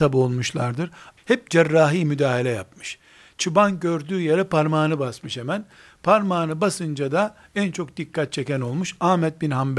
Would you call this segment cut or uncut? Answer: cut